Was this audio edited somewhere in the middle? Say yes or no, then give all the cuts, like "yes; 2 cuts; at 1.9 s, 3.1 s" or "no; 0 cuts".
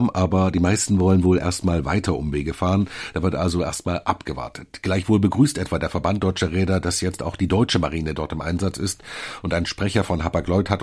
no; 0 cuts